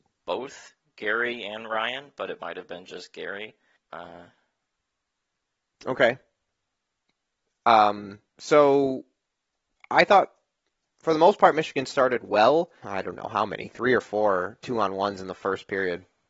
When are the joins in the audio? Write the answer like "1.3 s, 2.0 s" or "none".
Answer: 3.8 s, 8.3 s, 12.8 s

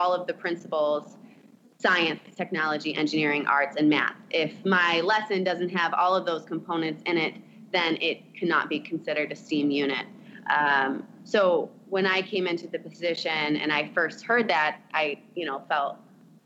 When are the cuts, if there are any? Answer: none

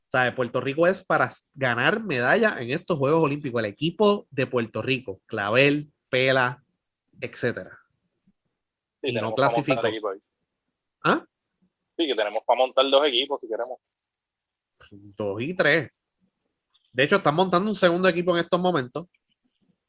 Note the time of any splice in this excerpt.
none

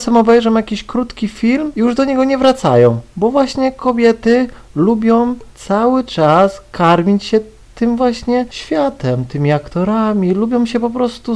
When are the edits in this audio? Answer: none

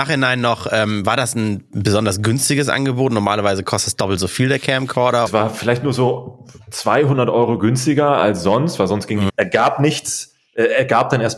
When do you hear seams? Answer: 5.3 s, 9.3 s

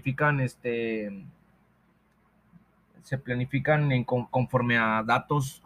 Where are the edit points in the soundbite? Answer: 4.3 s

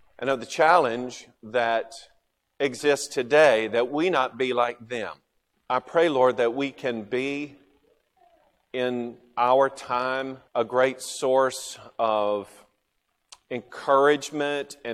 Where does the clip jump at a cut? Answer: 5.5 s, 10.5 s

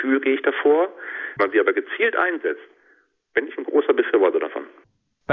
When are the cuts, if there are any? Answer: 1.4 s

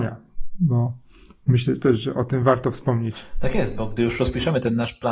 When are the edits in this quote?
none

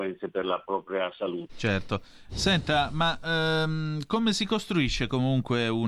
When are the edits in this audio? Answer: 1.5 s

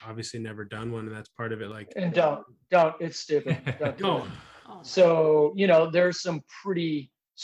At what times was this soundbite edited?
4.2 s

